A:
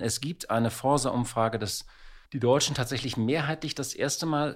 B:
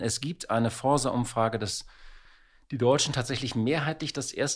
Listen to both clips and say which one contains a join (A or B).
A